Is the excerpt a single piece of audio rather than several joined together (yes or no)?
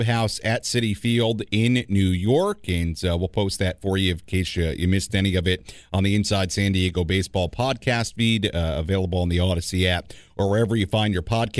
yes